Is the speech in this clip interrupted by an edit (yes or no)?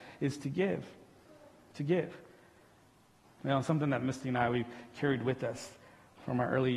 yes